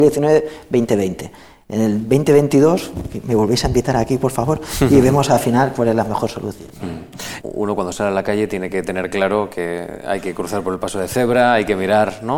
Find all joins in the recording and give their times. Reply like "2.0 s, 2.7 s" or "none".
7.4 s